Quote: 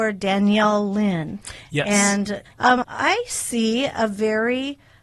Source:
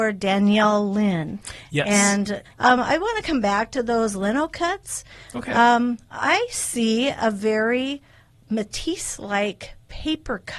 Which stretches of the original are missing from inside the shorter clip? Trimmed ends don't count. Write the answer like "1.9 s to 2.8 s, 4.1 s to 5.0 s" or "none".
2.8 s to 6.1 s